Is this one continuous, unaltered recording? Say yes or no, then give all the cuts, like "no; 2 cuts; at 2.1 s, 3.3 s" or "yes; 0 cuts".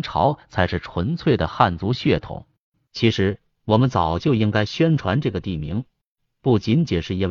no; 1 cut; at 2.9 s